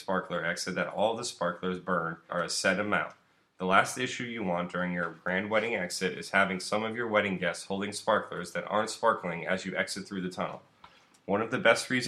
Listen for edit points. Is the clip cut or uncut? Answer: cut